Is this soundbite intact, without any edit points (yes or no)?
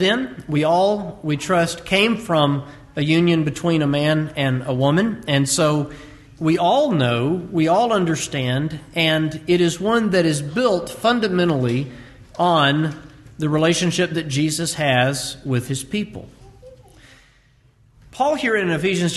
no